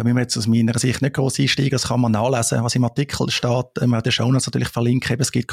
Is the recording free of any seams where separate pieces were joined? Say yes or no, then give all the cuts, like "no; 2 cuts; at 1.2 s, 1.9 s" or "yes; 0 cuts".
yes; 0 cuts